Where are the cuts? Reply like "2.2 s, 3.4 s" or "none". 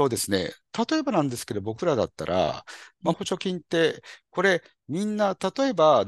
3.1 s